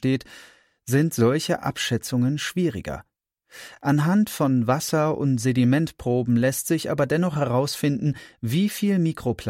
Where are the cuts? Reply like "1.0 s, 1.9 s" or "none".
none